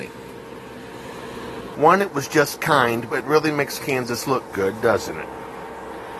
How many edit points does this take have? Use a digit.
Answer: 2